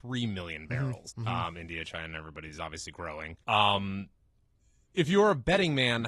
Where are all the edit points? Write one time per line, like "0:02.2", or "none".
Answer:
0:01.1
0:03.4